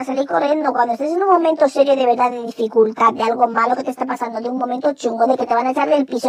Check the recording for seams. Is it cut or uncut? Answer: uncut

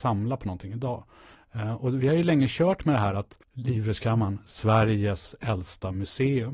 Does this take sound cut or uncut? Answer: cut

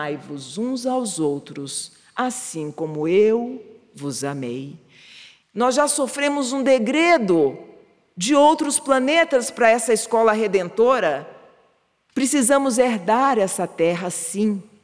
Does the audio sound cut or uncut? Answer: cut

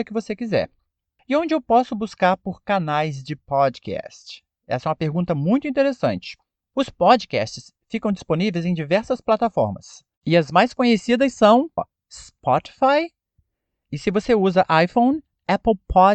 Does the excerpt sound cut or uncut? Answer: cut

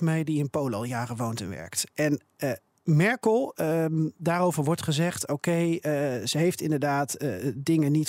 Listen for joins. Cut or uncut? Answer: uncut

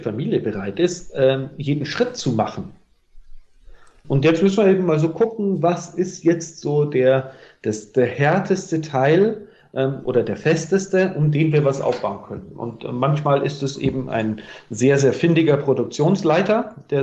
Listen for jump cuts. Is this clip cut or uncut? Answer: cut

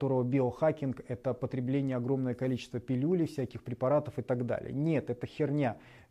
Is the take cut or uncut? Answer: uncut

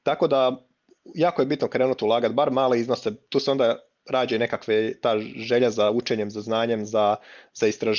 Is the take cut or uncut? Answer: uncut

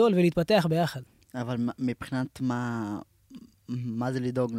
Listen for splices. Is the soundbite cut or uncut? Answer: uncut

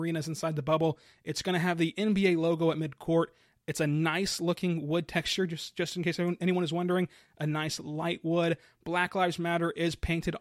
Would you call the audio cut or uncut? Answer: uncut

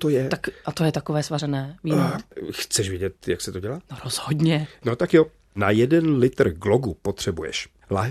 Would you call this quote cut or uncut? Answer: uncut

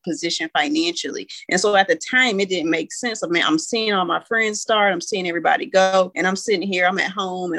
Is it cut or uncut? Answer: uncut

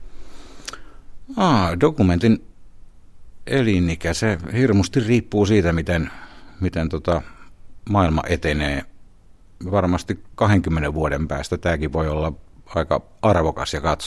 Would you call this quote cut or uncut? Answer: uncut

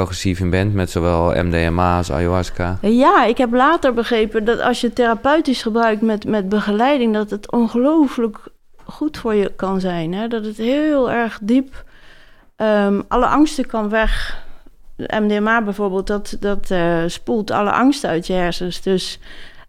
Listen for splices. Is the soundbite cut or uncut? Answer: uncut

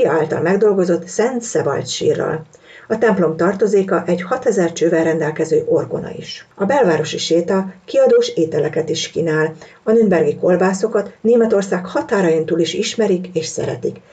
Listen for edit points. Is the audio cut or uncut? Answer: uncut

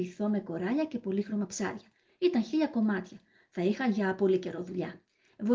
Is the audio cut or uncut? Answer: uncut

